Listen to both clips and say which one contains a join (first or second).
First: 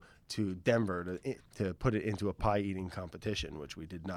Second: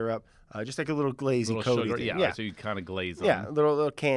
first